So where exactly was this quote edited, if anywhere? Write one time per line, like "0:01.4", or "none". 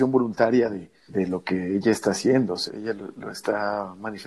0:01.1
0:02.7